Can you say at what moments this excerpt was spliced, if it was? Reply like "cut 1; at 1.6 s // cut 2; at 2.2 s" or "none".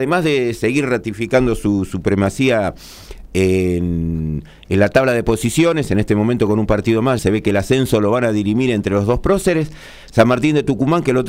cut 1; at 7.2 s